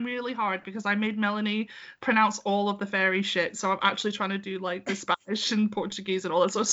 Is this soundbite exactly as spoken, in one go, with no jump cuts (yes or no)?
yes